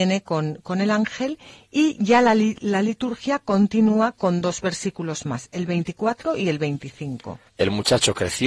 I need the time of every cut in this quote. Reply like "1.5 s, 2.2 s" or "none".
7.5 s